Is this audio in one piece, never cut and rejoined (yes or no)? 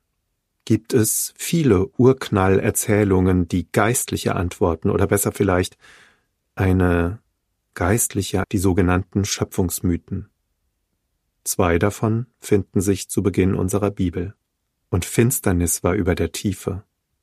no